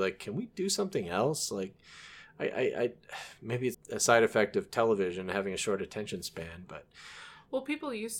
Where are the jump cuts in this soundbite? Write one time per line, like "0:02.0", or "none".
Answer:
0:03.7